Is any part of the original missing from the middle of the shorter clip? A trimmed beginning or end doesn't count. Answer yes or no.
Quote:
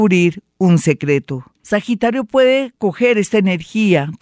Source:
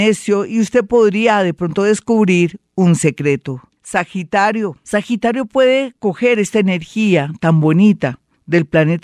yes